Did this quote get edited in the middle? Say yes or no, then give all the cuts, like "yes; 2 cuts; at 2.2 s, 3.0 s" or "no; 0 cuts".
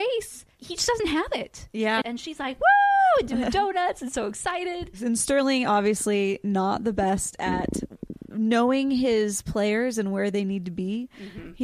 yes; 1 cut; at 2.0 s